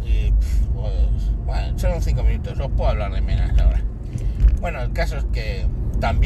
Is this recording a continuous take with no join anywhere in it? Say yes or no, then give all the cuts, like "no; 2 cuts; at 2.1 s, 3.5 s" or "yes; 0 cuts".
yes; 0 cuts